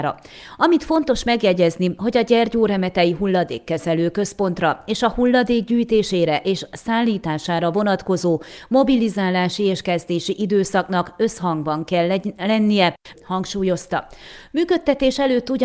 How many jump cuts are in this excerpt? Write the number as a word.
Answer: one